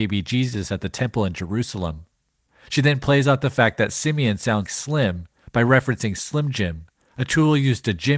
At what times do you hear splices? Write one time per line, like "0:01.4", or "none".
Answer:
0:04.7